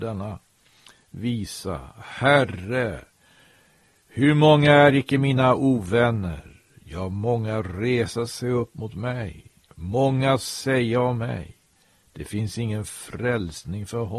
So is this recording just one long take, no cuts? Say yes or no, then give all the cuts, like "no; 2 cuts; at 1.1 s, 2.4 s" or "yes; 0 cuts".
yes; 0 cuts